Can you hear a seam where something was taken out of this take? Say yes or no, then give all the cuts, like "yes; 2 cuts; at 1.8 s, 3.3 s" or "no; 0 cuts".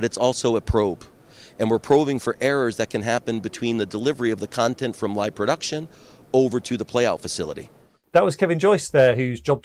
no; 0 cuts